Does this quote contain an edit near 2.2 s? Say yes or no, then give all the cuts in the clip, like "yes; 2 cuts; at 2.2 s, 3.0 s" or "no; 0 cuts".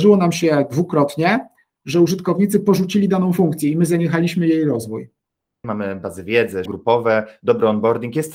no; 2 cuts; at 5.6 s, 6.7 s